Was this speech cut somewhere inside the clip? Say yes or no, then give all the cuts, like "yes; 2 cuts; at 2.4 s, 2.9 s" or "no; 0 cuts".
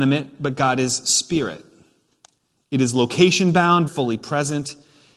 yes; 1 cut; at 3.9 s